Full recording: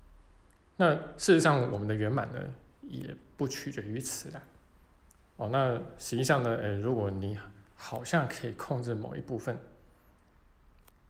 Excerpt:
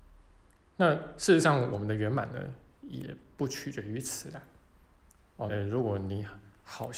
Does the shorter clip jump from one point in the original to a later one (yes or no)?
yes